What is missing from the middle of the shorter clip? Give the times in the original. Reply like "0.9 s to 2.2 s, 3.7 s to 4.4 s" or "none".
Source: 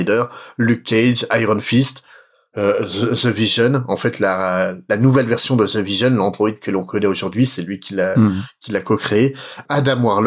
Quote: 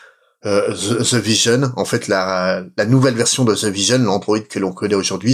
none